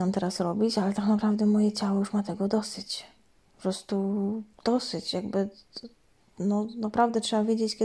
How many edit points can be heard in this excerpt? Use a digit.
0